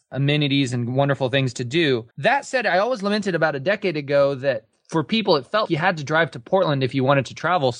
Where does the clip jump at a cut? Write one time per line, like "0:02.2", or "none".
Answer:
0:02.1
0:05.6